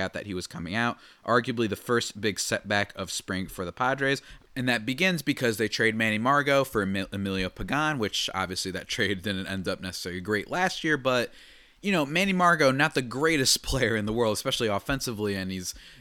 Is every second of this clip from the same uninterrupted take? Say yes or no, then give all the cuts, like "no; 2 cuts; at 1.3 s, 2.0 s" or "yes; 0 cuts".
no; 1 cut; at 4.4 s